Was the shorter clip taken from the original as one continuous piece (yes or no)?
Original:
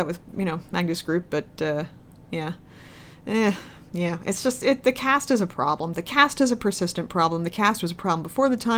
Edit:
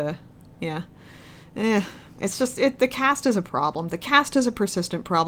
no